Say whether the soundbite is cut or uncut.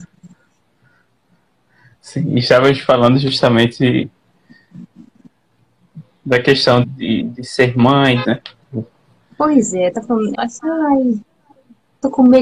cut